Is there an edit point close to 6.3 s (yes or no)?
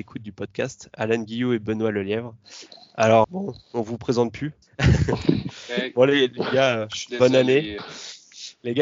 no